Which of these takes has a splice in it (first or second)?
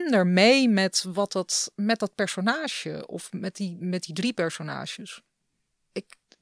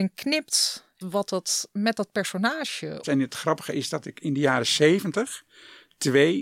second